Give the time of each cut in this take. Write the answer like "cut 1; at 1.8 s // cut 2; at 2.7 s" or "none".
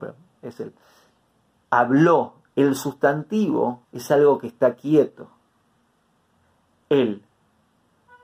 cut 1; at 2.5 s // cut 2; at 3.8 s